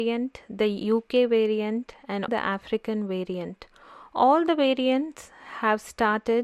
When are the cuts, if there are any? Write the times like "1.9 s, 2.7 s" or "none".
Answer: 2.3 s